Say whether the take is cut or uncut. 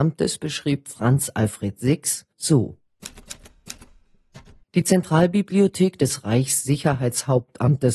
cut